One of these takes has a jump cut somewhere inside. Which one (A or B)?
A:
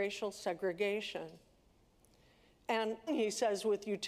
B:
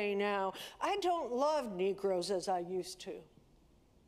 A